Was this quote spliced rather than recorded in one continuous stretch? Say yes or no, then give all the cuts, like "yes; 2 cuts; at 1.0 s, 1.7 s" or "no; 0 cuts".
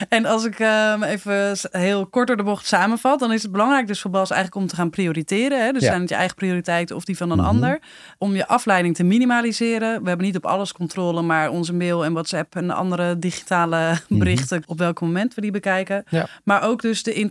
yes; 1 cut; at 14.6 s